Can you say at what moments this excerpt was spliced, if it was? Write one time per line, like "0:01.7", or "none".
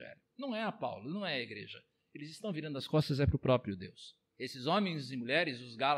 0:04.3